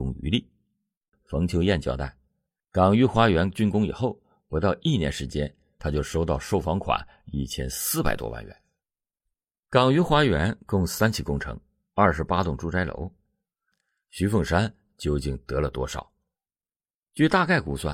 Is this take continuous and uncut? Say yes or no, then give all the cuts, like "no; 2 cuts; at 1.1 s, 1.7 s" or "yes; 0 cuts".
no; 1 cut; at 1.1 s